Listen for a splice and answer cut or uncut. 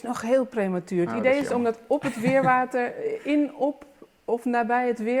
uncut